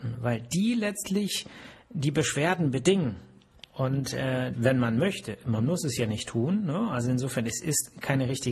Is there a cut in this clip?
yes; 1 cut; at 4.5 s

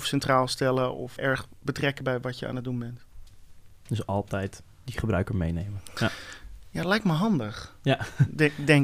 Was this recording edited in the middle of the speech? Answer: yes; 1 cut; at 1.2 s

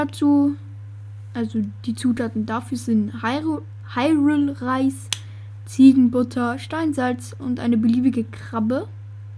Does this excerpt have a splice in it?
no; 0 cuts

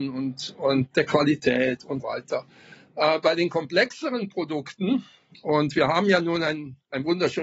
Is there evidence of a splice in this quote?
yes; 1 cut; at 2.0 s

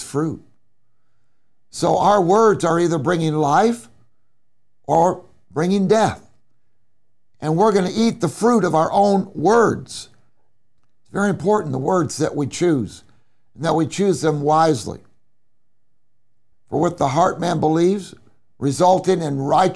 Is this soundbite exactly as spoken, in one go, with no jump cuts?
no; 1 cut; at 16.5 s

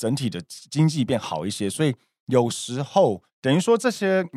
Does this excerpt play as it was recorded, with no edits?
no; 1 cut; at 3.3 s

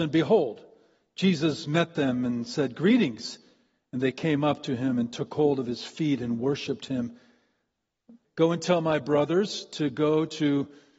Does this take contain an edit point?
yes; 1 cut; at 8.2 s

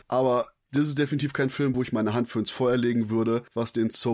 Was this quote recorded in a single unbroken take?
yes; 0 cuts

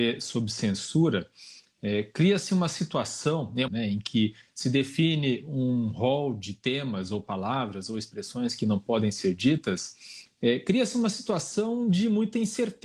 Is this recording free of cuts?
no; 1 cut; at 3.7 s

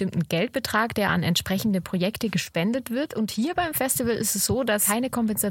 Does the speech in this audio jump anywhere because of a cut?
no; 0 cuts

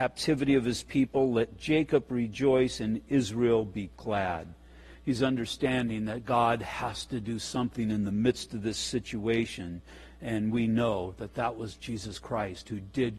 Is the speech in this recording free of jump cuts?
yes; 0 cuts

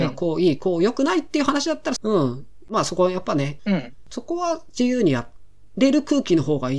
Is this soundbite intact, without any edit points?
no; 2 cuts; at 2.0 s, 3.6 s

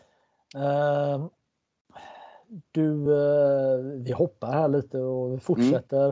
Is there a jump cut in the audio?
no; 0 cuts

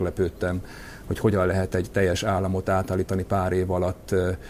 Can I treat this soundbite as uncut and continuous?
yes; 0 cuts

